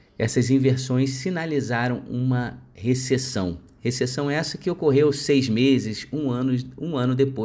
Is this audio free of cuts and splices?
yes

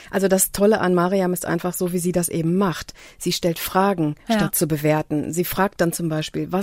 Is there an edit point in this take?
no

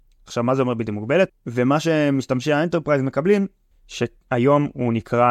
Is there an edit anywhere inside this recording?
yes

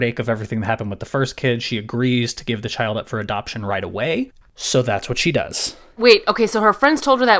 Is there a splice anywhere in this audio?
yes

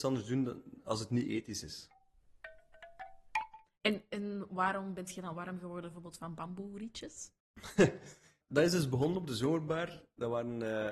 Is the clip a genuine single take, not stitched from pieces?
no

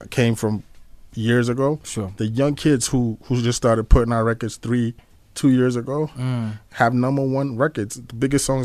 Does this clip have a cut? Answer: no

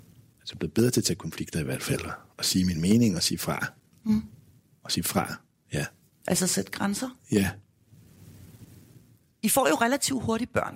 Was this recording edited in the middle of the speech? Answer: no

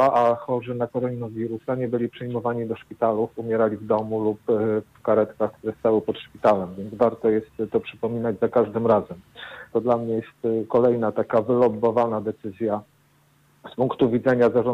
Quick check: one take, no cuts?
no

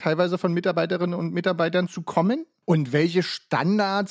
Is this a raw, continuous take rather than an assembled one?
no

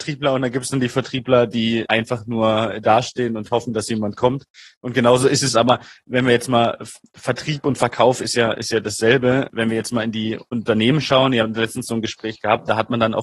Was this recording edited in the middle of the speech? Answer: no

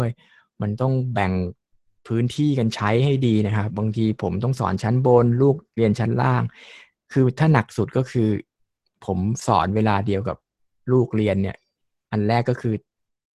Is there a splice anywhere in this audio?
yes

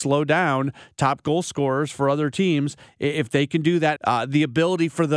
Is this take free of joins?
no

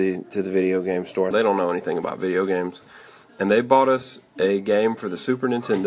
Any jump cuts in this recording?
yes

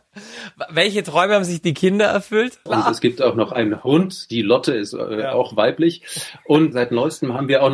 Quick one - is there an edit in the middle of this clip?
yes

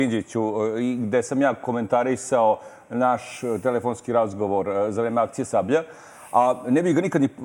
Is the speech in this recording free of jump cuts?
yes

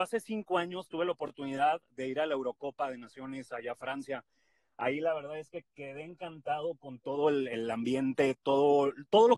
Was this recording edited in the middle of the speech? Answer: no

